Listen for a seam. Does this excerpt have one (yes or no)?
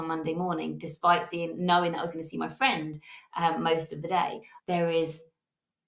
yes